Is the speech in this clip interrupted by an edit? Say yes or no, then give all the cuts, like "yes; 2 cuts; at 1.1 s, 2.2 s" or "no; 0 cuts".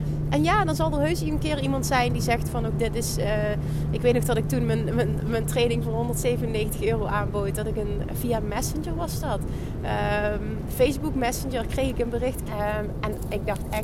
yes; 2 cuts; at 2.7 s, 12.5 s